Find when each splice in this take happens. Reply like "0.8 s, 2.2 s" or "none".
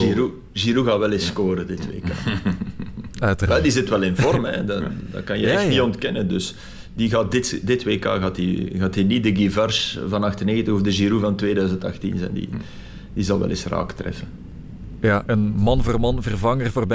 15.3 s